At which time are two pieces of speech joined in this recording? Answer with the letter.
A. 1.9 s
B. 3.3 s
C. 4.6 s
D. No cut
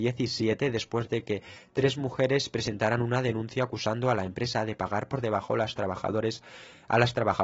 D